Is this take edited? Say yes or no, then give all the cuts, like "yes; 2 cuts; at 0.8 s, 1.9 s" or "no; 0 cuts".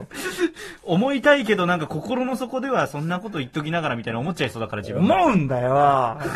no; 0 cuts